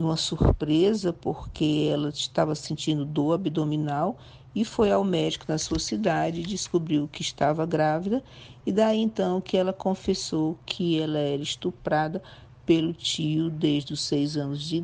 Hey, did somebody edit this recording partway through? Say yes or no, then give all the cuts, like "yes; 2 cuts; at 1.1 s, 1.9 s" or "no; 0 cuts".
no; 0 cuts